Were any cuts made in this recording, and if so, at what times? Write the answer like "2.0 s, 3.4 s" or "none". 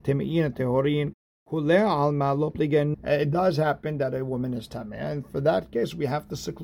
2.9 s